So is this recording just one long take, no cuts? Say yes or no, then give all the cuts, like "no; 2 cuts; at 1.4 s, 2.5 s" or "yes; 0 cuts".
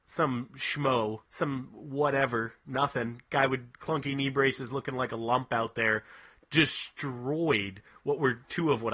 no; 1 cut; at 1.2 s